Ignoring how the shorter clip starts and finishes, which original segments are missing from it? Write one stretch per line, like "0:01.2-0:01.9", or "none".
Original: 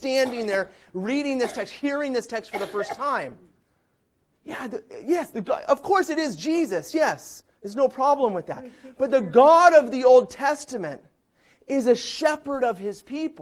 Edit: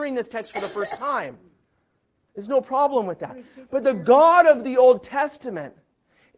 0:04.3-0:07.5